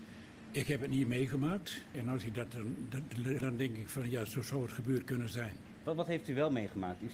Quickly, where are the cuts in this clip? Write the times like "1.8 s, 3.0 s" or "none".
1.9 s, 3.4 s, 5.8 s